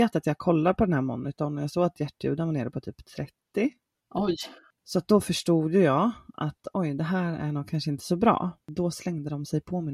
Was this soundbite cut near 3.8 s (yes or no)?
no